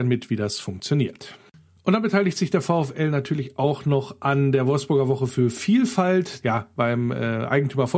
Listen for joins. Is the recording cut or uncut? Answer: cut